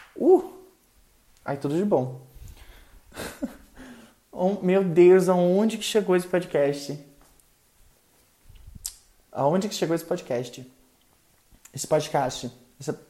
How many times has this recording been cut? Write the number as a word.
zero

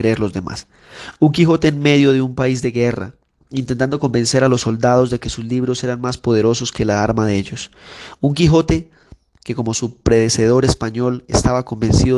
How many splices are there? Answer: zero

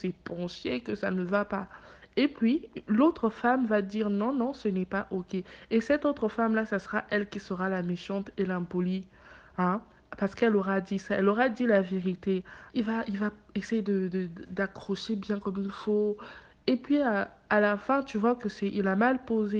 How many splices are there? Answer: one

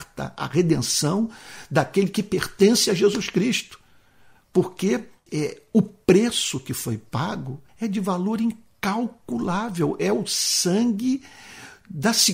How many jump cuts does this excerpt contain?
two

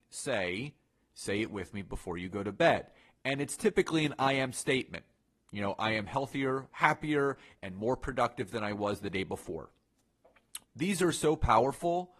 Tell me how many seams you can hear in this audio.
two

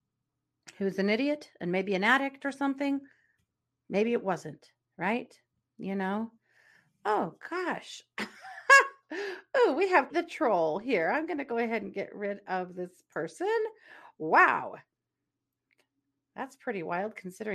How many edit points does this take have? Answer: one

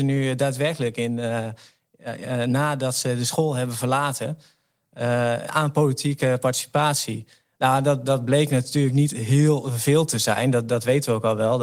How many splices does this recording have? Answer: zero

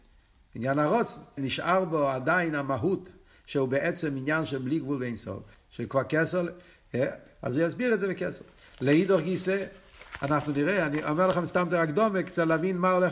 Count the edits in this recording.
two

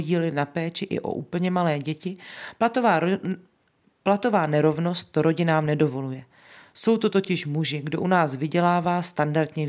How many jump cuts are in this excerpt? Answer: zero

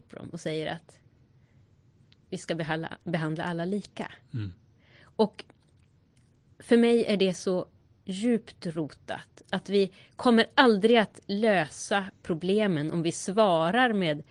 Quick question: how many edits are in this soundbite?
zero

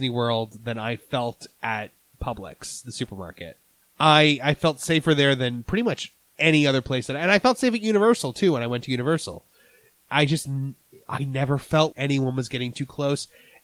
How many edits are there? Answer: two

